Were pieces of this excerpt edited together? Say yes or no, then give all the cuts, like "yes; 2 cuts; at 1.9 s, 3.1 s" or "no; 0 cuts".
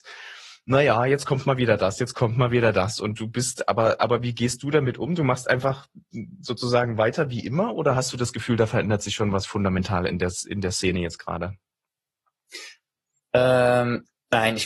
no; 0 cuts